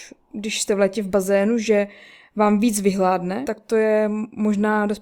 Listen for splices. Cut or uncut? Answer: cut